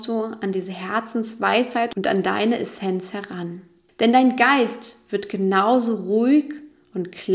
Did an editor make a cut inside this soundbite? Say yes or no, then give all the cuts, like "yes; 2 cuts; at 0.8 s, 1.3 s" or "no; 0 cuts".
no; 0 cuts